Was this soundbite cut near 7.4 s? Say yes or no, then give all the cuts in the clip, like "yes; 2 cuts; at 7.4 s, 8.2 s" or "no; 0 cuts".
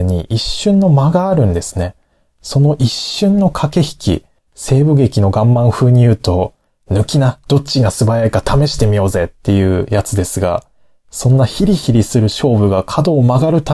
no; 1 cut; at 4.4 s